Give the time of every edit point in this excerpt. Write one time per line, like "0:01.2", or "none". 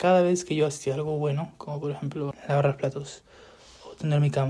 0:02.3